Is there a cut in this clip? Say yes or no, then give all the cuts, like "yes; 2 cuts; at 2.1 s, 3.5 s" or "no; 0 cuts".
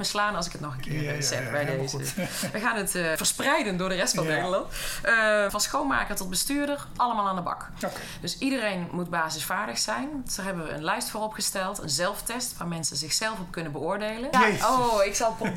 yes; 3 cuts; at 3.2 s, 5.5 s, 14.3 s